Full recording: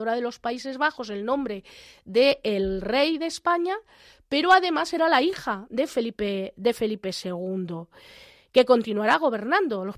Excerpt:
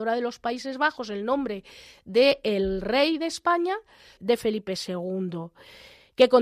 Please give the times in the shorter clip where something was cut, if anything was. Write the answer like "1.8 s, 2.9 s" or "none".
4.2 s